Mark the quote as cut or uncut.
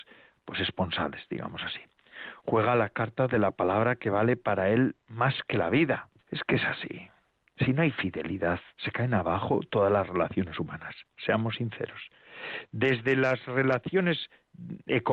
cut